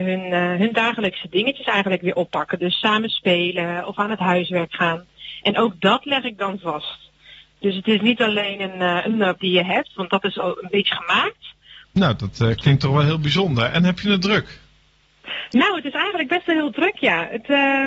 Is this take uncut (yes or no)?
no